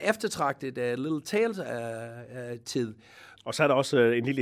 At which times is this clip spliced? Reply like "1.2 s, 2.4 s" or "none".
3.4 s